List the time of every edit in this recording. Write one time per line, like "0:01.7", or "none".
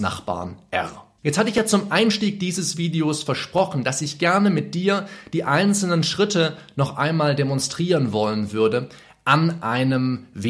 0:01.2